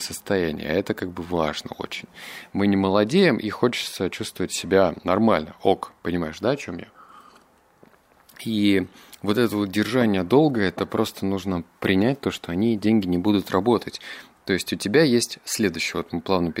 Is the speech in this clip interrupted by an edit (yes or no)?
no